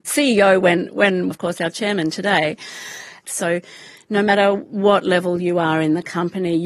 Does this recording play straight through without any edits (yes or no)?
no